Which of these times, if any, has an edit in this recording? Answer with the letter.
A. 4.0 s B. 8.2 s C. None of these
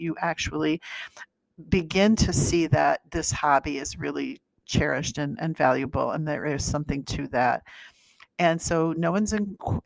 C